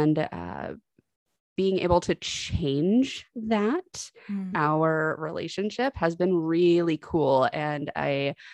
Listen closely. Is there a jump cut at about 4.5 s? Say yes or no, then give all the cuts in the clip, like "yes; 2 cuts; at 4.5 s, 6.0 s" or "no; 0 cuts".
yes; 1 cut; at 4.5 s